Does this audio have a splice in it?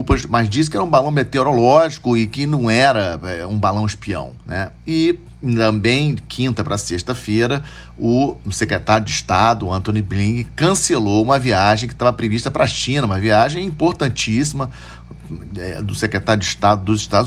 yes; 1 cut; at 4.4 s

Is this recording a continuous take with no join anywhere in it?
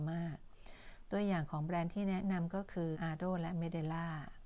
no; 1 cut; at 2.9 s

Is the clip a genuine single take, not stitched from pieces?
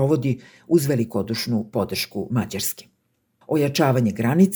no; 1 cut; at 3.4 s

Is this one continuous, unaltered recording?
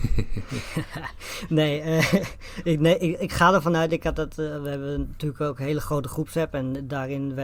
yes; 0 cuts

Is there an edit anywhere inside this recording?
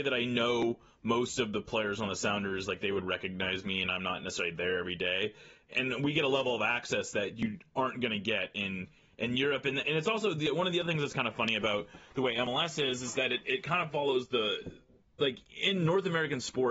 no; 0 cuts

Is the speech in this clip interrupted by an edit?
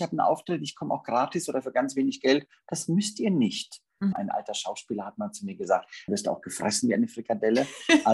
yes; 2 cuts; at 4.1 s, 6.1 s

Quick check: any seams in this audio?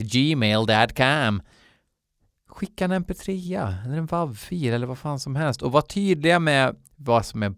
no; 0 cuts

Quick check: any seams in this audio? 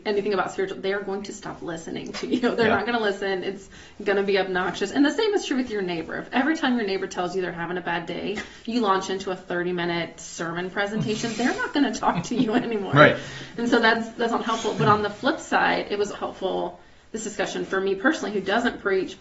yes; 1 cut; at 16.1 s

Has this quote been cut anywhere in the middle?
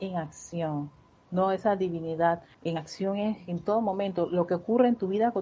yes; 1 cut; at 2.5 s

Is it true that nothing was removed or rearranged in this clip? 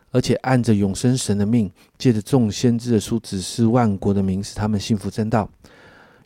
yes; 0 cuts

